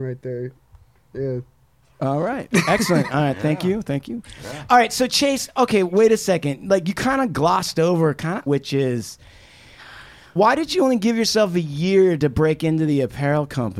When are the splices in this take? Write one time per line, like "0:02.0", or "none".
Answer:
0:08.5
0:10.4